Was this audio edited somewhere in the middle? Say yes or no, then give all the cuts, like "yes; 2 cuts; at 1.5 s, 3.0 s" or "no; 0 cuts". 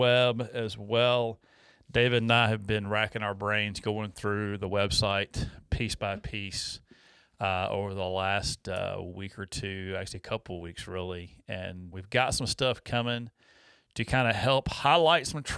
yes; 1 cut; at 11.9 s